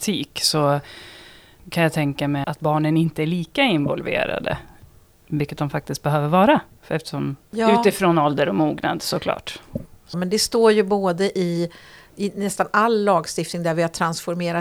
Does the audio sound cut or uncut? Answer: cut